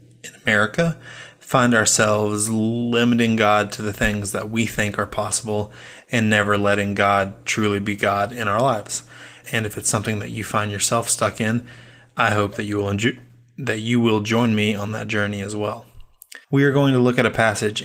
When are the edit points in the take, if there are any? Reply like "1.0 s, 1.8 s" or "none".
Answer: 9.4 s, 16.4 s